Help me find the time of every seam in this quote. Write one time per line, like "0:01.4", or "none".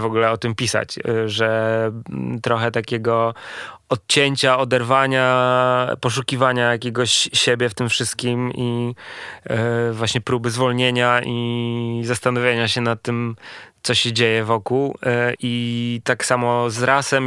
0:15.4